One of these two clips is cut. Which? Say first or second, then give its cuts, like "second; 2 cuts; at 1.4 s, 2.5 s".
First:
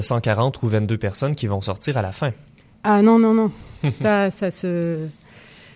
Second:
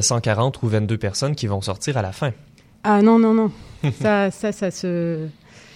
first; 1 cut; at 4.3 s